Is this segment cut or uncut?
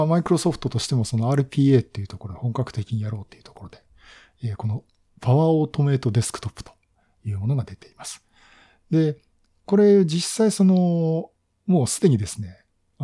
uncut